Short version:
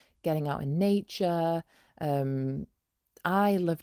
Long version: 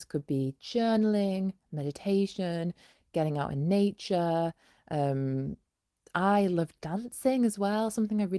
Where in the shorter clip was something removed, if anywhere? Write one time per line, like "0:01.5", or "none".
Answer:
none

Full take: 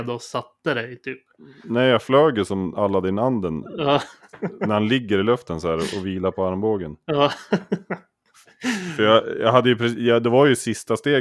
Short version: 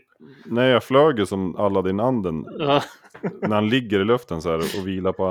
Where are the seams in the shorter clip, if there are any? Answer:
none

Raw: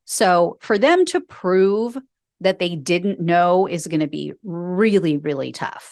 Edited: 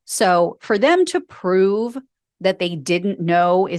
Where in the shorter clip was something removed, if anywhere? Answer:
none

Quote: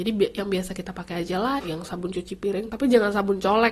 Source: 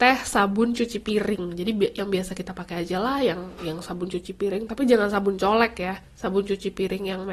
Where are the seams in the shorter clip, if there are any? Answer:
0:01.6

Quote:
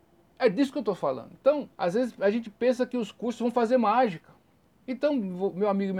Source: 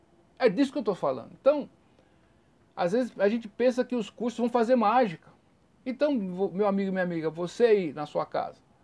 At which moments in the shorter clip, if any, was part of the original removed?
0:01.7

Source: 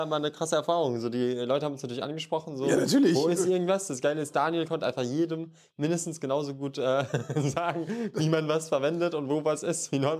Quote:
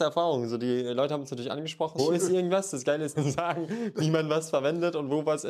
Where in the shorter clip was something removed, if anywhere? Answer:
0:02.0
0:03.1

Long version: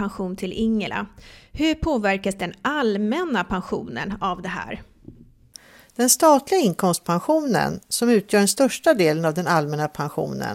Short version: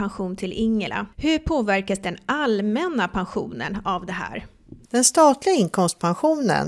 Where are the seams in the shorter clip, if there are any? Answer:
0:01.1
0:04.8

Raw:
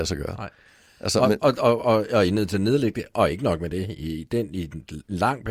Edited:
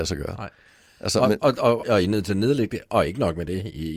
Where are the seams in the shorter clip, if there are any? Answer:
0:01.8

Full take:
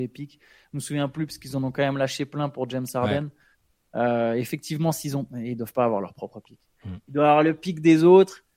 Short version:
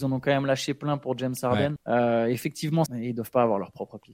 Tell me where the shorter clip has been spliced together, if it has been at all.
0:01.8
0:02.9

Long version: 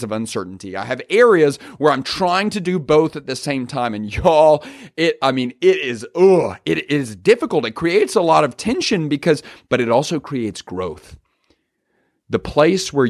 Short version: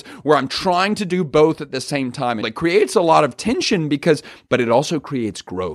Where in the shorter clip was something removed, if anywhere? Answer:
0:02.4

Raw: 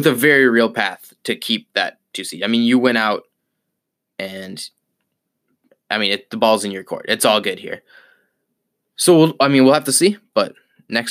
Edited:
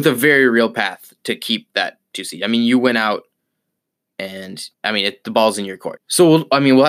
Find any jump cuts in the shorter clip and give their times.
0:04.7
0:06.0

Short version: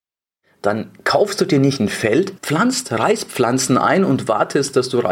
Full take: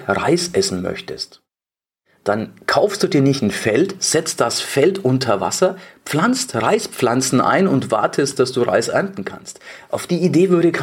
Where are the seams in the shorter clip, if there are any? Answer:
0:02.4

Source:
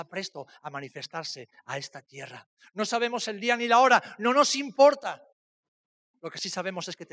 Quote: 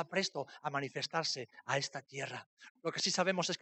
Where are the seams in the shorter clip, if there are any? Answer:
0:02.7

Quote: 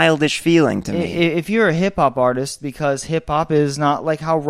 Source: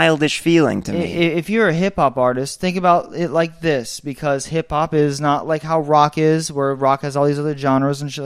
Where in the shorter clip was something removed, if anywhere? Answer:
0:02.6

